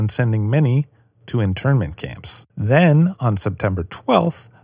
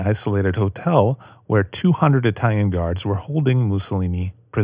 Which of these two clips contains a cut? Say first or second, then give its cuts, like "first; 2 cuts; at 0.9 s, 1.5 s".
first; 1 cut; at 2.5 s